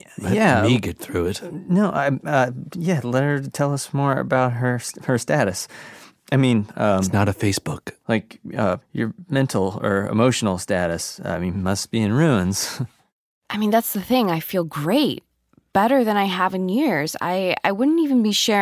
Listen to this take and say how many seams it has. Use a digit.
0